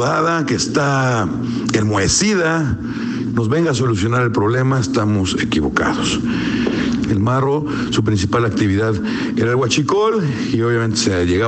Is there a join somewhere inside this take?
yes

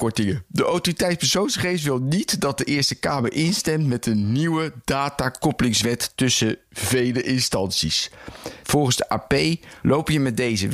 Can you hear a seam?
yes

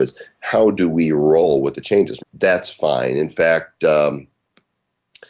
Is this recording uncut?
no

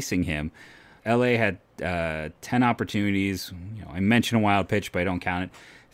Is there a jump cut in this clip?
yes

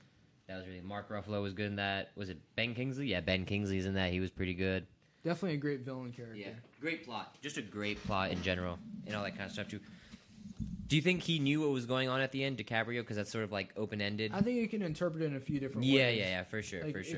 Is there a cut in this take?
no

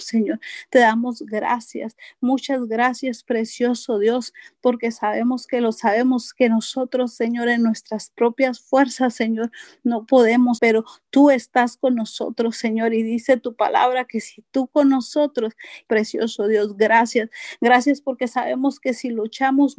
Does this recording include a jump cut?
yes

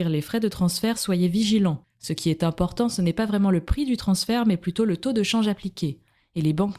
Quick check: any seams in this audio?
no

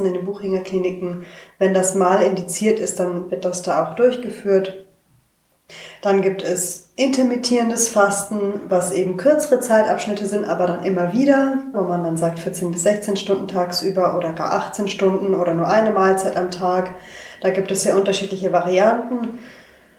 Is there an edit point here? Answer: yes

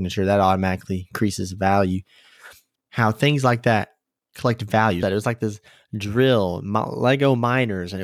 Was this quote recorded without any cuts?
no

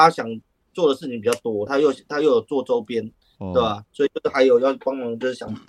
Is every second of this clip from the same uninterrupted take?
no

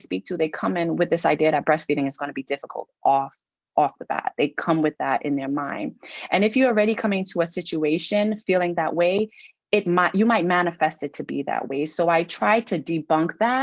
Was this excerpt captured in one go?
yes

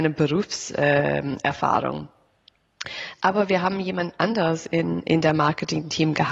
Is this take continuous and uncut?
yes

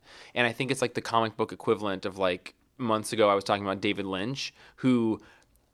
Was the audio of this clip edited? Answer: no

